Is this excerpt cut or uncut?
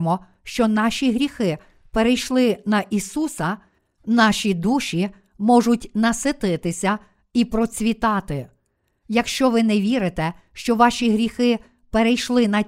uncut